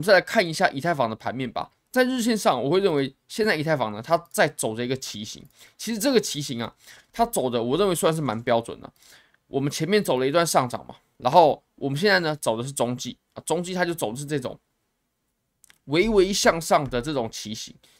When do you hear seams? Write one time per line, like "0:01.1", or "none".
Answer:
none